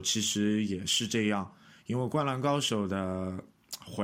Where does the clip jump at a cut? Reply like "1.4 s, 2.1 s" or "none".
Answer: none